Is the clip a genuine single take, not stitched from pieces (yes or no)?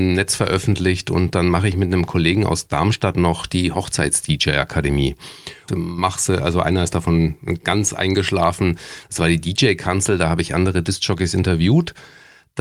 no